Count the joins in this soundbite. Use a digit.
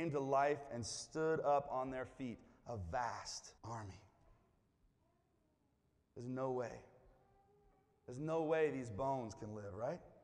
1